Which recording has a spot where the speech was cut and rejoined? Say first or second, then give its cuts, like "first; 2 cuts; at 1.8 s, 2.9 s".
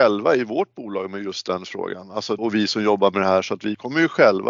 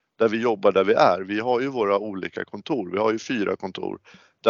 first; 1 cut; at 2.4 s